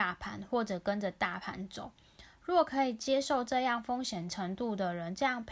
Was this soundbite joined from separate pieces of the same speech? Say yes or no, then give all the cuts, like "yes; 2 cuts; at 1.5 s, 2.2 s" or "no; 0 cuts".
no; 0 cuts